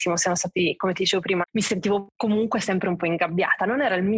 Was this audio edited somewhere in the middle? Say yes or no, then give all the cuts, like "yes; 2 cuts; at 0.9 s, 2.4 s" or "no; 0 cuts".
yes; 1 cut; at 1.4 s